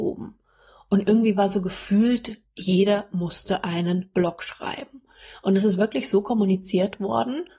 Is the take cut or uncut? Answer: uncut